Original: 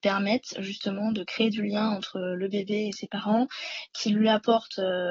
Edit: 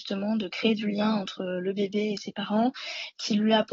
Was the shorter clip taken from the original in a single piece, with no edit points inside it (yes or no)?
yes